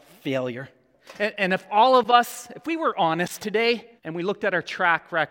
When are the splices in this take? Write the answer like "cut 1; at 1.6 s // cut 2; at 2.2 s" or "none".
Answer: cut 1; at 4.0 s